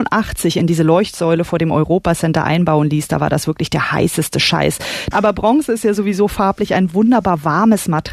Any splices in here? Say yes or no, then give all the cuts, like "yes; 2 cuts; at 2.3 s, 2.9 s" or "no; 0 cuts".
yes; 1 cut; at 5.1 s